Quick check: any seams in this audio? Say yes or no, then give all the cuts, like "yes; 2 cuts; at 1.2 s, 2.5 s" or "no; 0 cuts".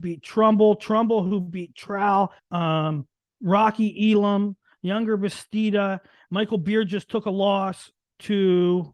yes; 2 cuts; at 2.4 s, 6.2 s